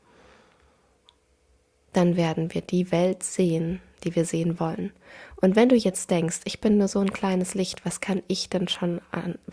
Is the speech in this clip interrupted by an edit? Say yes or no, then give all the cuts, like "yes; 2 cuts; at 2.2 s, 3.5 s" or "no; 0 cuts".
no; 0 cuts